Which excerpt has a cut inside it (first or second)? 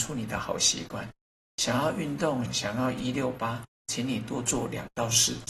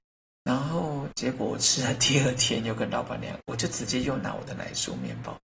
first